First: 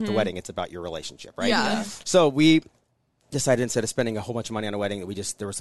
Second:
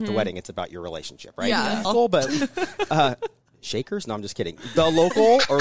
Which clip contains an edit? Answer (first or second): second